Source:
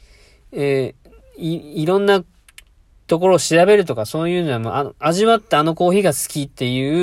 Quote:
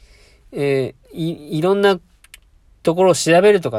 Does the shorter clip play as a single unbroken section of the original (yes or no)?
no